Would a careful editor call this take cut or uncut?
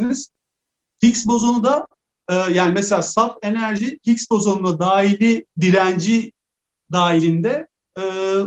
cut